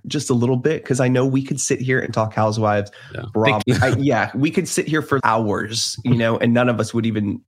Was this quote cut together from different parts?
yes; 2 cuts; at 3.6 s, 5.2 s

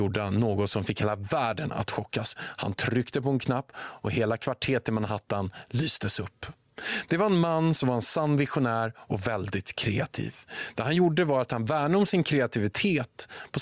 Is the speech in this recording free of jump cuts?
yes; 0 cuts

